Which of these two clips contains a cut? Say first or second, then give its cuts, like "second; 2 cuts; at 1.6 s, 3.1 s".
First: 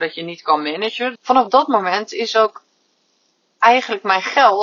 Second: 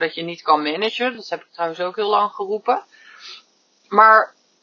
first; 1 cut; at 1.1 s